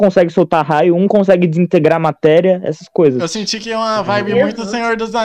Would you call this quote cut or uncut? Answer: uncut